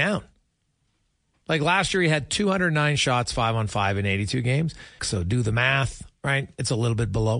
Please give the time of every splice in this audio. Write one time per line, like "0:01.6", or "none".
0:01.4
0:05.0